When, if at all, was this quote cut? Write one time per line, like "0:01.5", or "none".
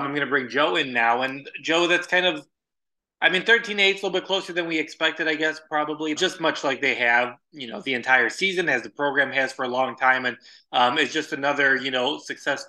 0:06.2